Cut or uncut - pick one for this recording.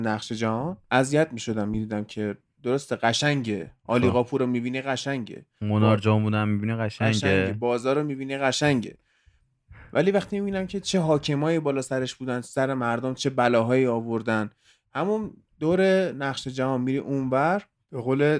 uncut